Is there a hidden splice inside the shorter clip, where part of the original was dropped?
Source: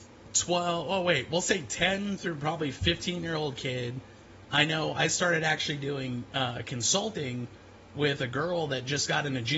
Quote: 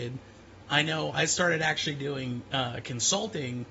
no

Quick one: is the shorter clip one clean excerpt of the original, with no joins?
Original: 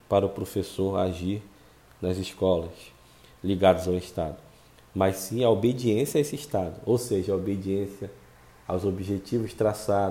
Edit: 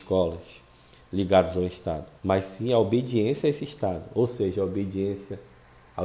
no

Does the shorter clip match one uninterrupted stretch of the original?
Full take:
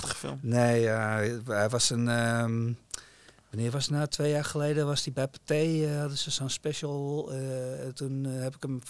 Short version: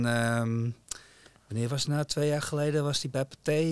yes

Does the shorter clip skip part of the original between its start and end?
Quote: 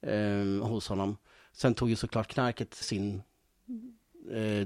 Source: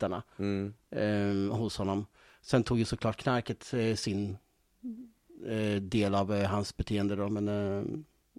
yes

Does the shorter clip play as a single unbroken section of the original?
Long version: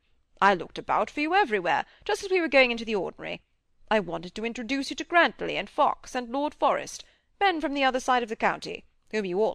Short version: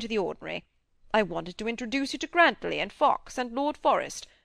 yes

